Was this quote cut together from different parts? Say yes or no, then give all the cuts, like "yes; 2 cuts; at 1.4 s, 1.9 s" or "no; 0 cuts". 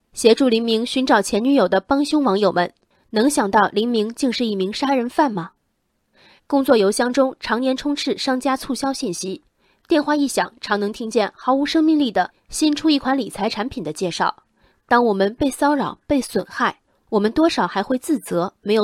yes; 1 cut; at 6.4 s